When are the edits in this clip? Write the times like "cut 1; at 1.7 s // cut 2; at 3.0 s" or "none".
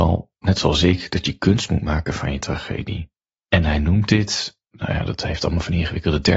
cut 1; at 3.3 s